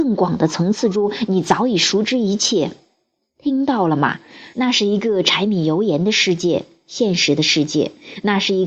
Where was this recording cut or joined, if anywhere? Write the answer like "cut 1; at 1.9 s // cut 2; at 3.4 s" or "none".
cut 1; at 4.5 s